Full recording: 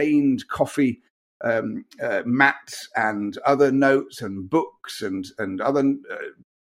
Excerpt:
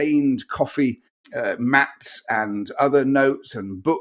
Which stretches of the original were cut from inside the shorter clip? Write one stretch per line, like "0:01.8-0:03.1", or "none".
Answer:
0:01.2-0:01.9

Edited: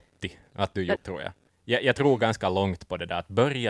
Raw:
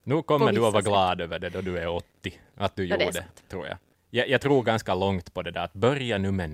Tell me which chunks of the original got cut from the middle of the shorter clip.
0:03.0-0:03.4

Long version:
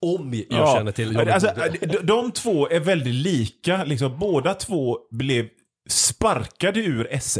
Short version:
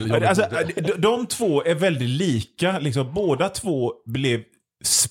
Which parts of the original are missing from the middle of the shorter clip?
none

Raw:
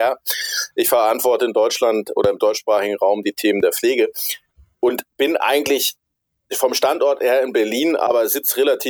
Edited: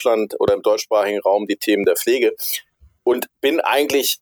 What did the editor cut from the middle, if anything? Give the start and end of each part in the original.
none

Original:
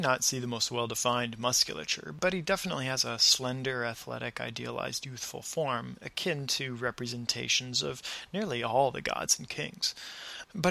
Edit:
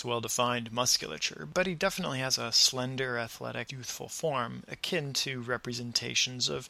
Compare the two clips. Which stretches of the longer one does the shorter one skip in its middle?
0:04.3-0:05.0

